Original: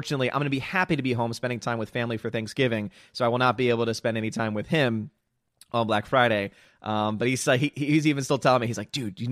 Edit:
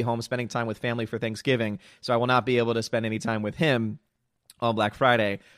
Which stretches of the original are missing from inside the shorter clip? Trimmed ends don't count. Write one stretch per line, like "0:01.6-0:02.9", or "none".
none